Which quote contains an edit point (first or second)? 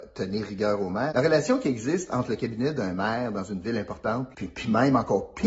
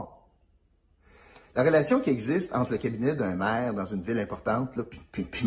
first